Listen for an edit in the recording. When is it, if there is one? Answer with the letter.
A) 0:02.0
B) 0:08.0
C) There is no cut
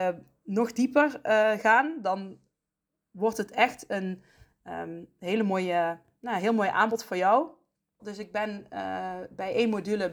B